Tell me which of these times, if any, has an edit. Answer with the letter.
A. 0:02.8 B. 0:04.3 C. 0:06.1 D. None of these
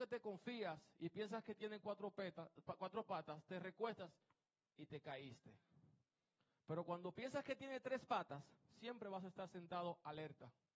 D